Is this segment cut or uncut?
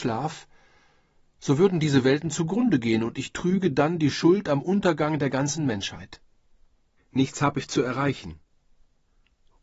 cut